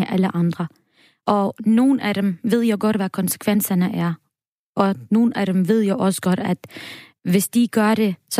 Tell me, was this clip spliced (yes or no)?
no